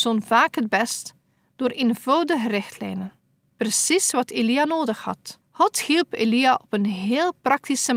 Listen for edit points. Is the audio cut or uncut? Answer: cut